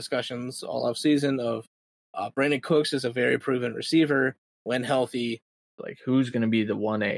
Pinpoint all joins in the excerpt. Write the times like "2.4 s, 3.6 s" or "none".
5.8 s